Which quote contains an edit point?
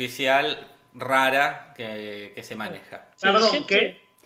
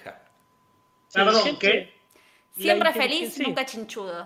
first; 1 cut; at 3.1 s

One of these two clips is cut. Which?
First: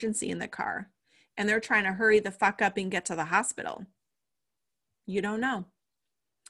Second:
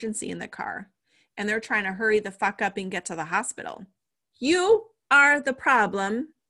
second; 1 cut; at 4.3 s

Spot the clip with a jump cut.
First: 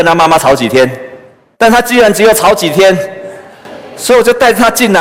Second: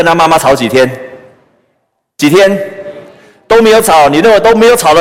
first; 1 cut; at 1.5 s

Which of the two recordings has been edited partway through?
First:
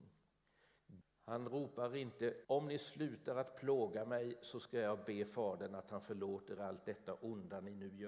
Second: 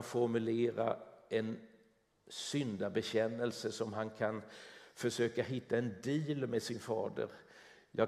first; 3 cuts; at 1.0 s, 2.4 s, 6.6 s

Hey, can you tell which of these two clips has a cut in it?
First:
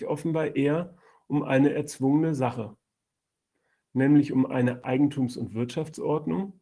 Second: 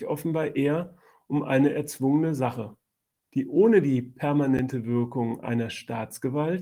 second; 1 cut; at 3.2 s

